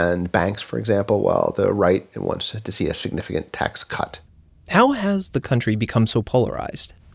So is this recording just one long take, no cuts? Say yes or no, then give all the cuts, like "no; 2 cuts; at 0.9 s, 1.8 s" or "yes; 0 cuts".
yes; 0 cuts